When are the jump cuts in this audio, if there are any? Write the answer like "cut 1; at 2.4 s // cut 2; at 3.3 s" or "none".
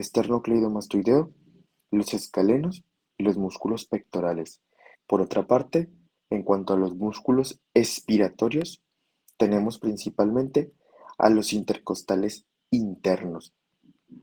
cut 1; at 4.9 s